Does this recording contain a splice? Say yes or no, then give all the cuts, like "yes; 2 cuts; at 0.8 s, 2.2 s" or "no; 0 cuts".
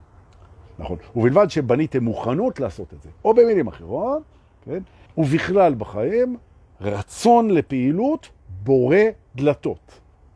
yes; 1 cut; at 5.1 s